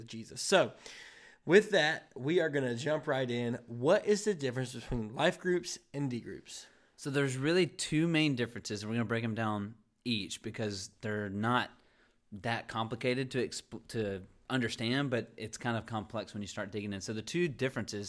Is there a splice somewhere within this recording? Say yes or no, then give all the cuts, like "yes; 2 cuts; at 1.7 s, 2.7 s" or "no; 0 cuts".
no; 0 cuts